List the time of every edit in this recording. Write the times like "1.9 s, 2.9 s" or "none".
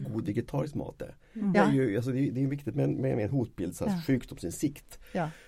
1.5 s